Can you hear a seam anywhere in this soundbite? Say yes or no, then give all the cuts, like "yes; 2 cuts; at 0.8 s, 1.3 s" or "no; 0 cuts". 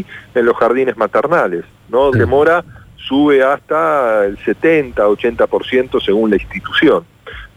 yes; 1 cut; at 2.1 s